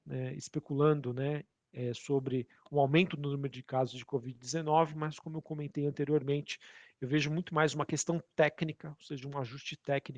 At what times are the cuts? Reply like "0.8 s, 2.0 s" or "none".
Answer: none